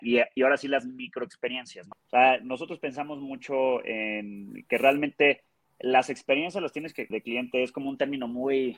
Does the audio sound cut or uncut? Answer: cut